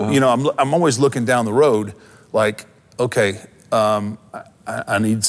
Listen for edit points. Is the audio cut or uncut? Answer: uncut